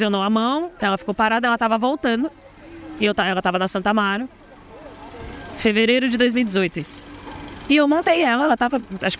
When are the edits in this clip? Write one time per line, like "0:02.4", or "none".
none